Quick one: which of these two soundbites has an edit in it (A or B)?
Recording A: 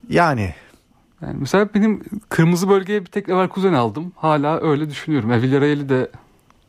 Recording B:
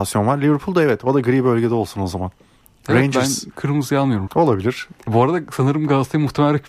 B